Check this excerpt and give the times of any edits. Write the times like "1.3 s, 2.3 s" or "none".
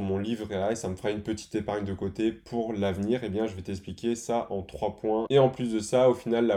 5.3 s